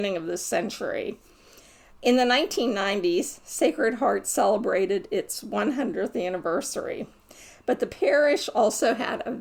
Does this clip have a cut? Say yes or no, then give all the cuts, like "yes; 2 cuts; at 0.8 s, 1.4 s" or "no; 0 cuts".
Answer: yes; 1 cut; at 1.9 s